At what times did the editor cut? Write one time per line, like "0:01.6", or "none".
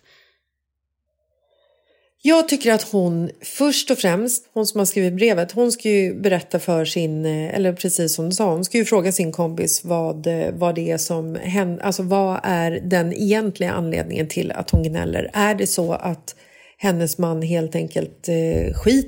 0:04.4